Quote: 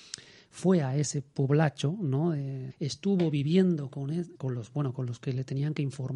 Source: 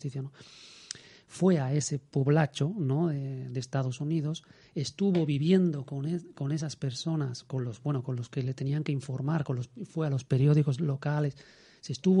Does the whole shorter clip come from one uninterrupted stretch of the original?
no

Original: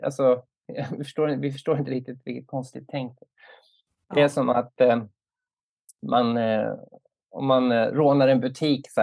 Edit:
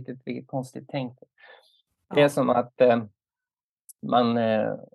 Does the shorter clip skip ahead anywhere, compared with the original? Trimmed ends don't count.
no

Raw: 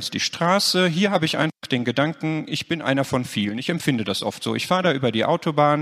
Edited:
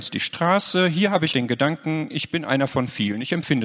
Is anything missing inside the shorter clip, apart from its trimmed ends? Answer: yes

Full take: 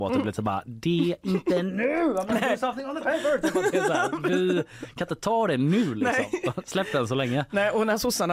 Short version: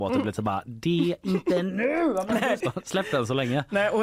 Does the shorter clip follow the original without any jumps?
no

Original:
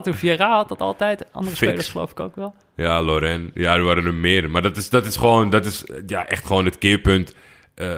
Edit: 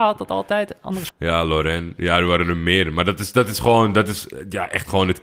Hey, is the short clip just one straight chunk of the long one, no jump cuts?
no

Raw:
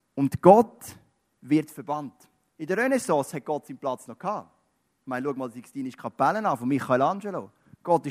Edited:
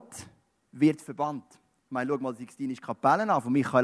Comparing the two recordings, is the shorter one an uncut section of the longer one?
no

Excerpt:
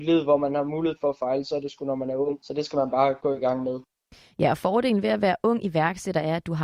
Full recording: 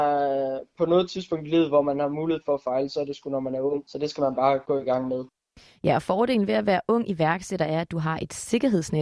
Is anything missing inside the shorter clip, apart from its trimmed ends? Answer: no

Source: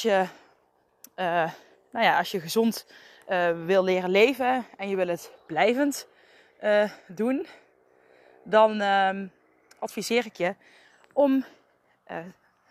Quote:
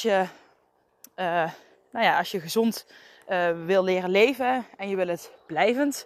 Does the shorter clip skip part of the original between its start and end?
no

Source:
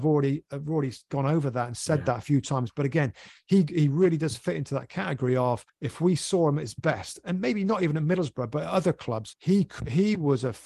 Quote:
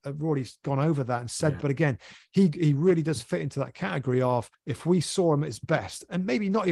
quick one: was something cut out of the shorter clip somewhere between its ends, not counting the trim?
yes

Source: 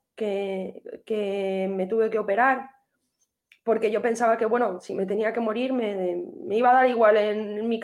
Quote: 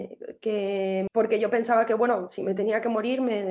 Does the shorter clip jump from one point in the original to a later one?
yes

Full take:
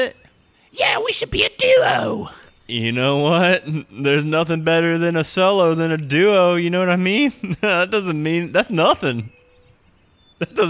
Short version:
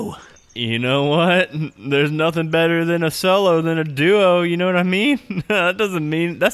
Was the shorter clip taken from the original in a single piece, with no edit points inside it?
yes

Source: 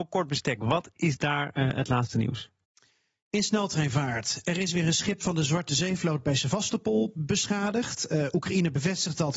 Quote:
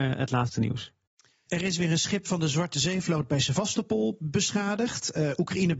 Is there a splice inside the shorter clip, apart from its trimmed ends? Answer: yes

